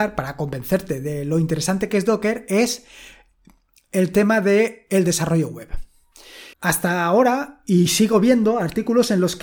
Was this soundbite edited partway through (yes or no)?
yes